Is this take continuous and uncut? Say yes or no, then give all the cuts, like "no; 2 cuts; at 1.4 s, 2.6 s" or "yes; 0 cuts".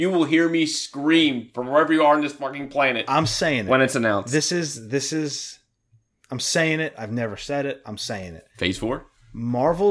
yes; 0 cuts